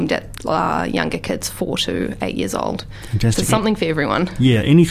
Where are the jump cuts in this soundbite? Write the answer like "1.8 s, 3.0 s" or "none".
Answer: none